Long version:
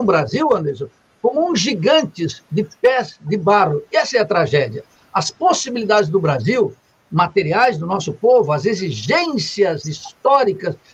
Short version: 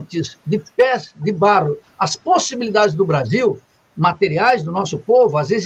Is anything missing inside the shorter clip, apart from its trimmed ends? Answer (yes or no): yes